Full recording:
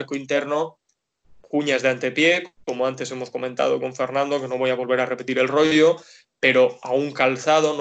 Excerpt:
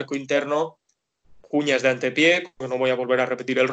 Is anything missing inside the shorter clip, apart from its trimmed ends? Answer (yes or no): yes